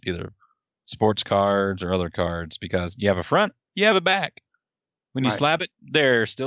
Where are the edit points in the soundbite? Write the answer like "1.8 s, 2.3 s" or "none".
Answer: none